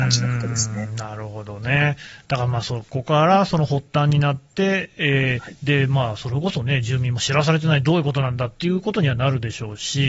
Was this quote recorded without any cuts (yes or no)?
yes